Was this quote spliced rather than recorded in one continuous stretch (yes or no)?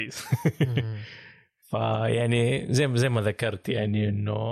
no